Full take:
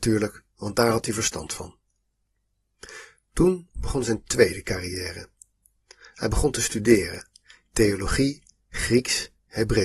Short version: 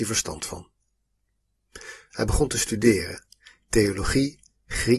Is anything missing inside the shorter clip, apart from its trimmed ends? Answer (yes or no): yes